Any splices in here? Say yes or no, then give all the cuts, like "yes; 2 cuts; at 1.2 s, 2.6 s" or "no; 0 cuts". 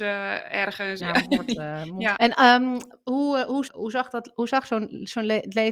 yes; 3 cuts; at 1.0 s, 2.2 s, 3.7 s